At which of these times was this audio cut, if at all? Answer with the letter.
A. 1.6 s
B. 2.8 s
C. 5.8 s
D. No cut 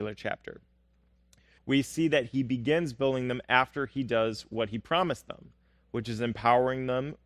A